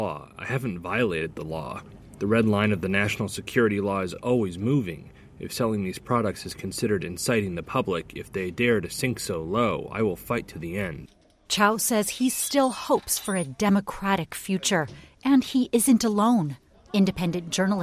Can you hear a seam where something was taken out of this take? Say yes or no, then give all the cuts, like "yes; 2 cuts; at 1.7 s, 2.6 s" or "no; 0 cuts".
no; 0 cuts